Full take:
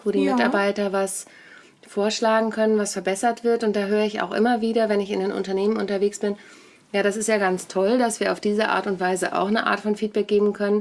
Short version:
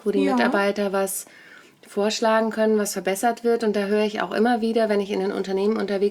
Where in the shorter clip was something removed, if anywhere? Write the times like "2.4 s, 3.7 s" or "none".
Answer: none